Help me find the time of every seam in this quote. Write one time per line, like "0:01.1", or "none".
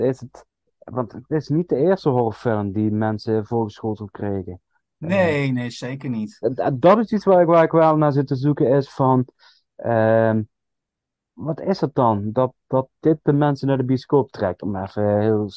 none